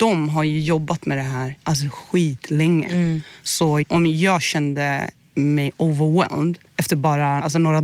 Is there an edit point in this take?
yes; 1 cut; at 6.7 s

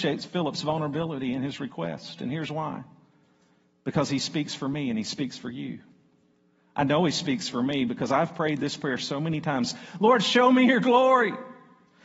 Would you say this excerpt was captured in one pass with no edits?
yes; 0 cuts

